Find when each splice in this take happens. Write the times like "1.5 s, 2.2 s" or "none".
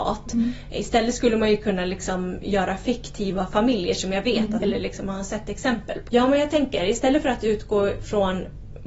4.6 s, 6.1 s